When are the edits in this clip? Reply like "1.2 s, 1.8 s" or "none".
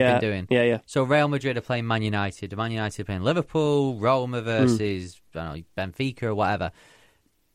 none